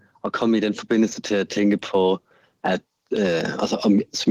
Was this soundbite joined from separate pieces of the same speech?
no; 0 cuts

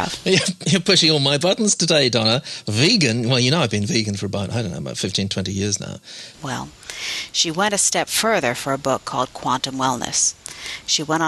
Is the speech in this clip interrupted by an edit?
yes; 1 cut; at 6.3 s

